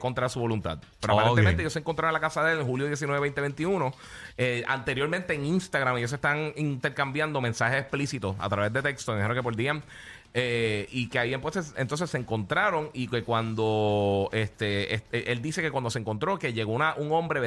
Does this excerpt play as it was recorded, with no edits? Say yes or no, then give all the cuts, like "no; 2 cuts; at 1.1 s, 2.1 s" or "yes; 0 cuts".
yes; 0 cuts